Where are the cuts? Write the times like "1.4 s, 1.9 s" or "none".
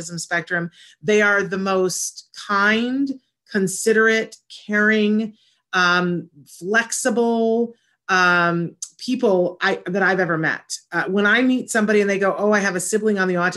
none